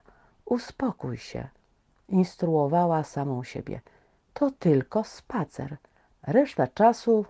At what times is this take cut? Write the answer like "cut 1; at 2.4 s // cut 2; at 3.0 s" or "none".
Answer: cut 1; at 6.2 s